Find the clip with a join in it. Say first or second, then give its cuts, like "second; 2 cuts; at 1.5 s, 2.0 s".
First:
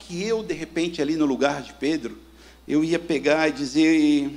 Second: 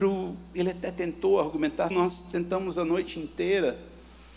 second; 1 cut; at 1.9 s